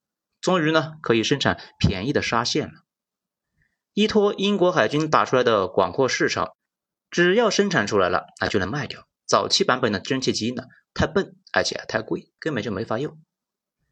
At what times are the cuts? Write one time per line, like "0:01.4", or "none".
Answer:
0:09.2
0:12.4